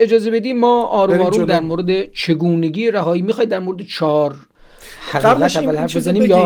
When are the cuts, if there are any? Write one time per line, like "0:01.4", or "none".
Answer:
none